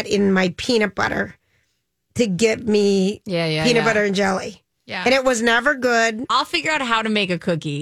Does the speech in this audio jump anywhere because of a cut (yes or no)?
yes